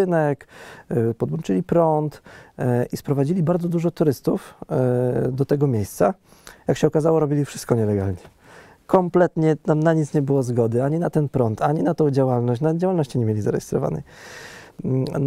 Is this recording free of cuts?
yes; 0 cuts

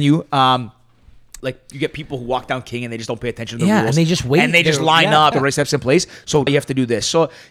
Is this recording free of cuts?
no; 3 cuts; at 1.4 s, 5.3 s, 6.5 s

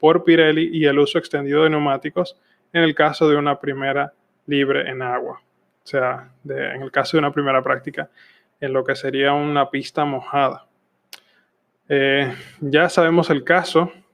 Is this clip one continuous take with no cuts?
yes; 0 cuts

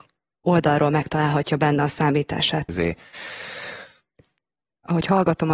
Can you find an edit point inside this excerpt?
yes; 1 cut; at 2.7 s

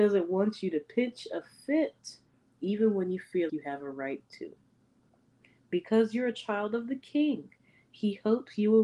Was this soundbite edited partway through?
yes; 1 cut; at 3.5 s

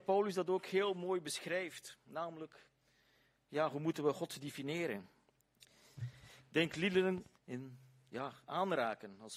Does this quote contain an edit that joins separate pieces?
yes; 2 cuts; at 6.0 s, 7.3 s

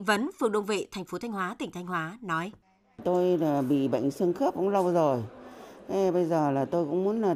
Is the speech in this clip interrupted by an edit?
no; 0 cuts

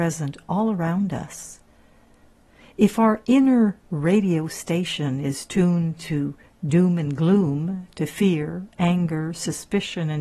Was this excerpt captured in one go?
yes; 0 cuts

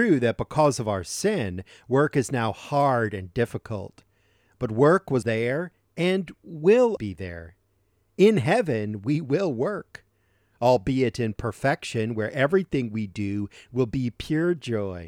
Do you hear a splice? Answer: yes; 2 cuts; at 5.2 s, 7.0 s

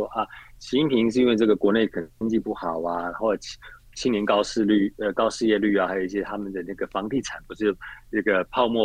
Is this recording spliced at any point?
no; 0 cuts

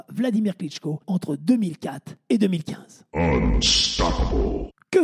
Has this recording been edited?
no; 0 cuts

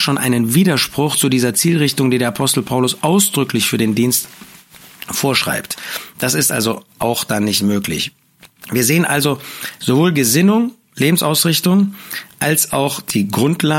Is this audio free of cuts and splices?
yes; 0 cuts

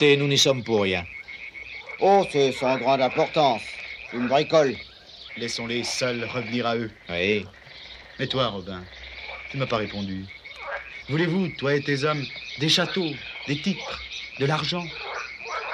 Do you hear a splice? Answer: yes; 3 cuts; at 2.0 s, 5.3 s, 7.5 s

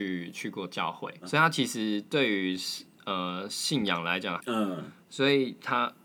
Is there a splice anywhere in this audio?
yes; 2 cuts; at 1.2 s, 4.4 s

